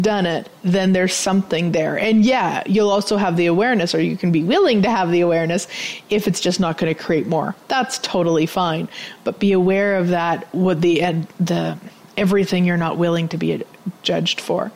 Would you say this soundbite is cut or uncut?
uncut